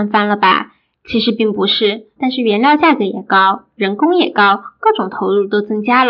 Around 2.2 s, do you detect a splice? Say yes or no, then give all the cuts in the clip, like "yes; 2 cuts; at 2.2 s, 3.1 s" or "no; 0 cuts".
yes; 1 cut; at 2.2 s